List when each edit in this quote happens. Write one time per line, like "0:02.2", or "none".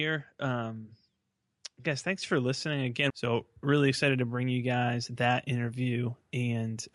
0:03.1

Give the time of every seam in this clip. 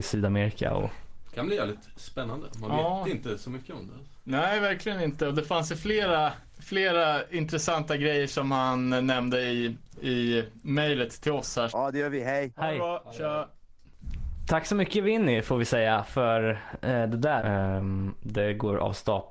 0:11.7
0:17.4

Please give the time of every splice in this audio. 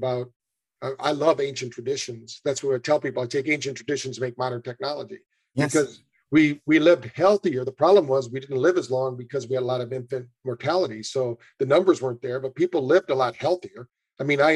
none

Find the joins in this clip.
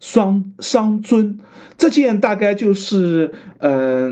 none

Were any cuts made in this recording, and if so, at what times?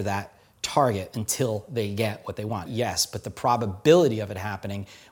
0:02.7

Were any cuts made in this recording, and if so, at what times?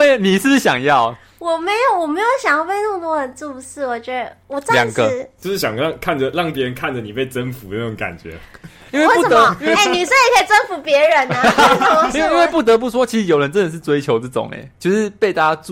none

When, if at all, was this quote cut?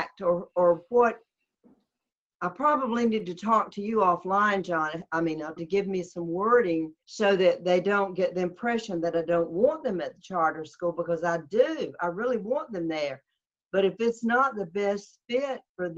0:05.6
0:07.0

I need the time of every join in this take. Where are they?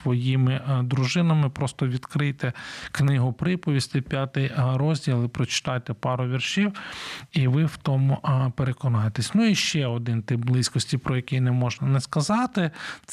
none

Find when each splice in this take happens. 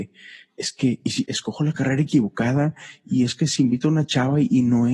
0:01.3

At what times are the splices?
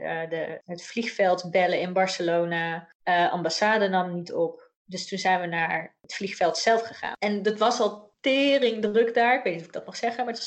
0:07.2

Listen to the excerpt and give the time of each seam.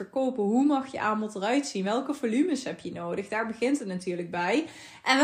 none

